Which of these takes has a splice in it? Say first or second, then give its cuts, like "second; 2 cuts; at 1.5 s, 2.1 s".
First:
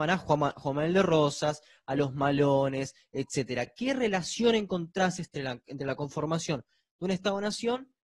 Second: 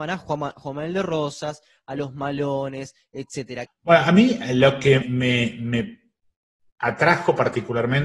second; 2 cuts; at 3.7 s, 5.0 s